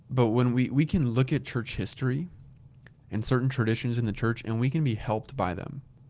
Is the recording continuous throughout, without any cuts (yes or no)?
yes